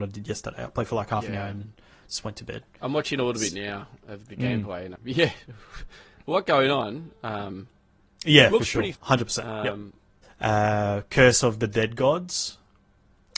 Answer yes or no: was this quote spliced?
yes